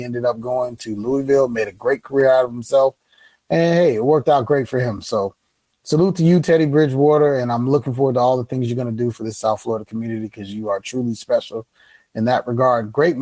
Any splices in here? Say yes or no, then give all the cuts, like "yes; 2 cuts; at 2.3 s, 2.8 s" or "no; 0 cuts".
no; 0 cuts